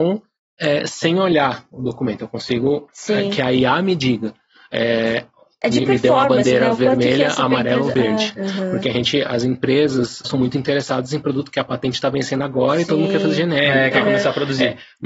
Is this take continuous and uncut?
no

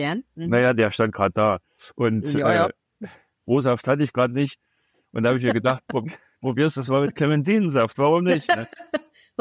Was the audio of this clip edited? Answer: no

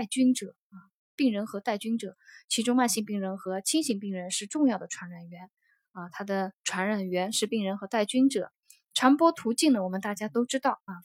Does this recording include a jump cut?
yes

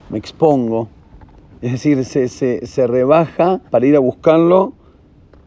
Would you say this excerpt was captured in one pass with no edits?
no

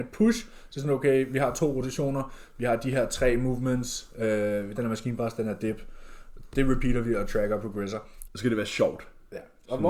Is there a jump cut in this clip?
yes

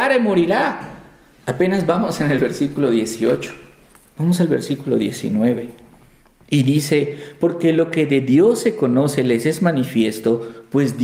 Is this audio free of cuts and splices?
no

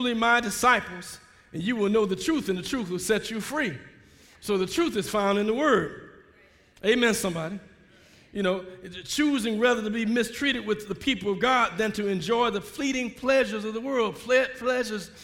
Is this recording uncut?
yes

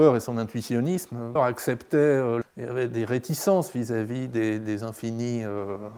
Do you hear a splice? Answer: yes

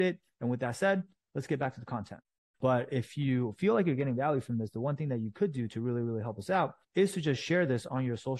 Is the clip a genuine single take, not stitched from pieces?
no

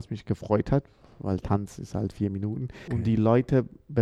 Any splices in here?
yes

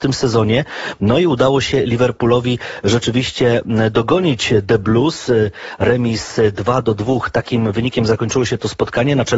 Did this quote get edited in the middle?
no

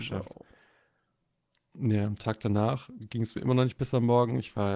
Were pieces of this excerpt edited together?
yes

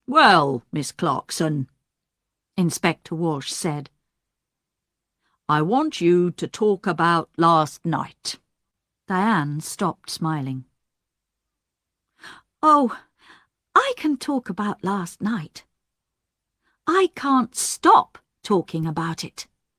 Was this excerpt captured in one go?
yes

